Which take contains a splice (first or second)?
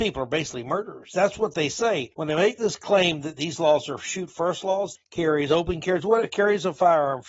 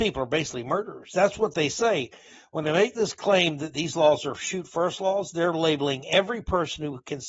first